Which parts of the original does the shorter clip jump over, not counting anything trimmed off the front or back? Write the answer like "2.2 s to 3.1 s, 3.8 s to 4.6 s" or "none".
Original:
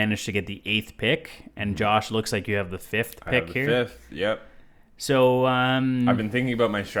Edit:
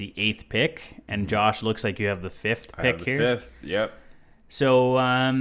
none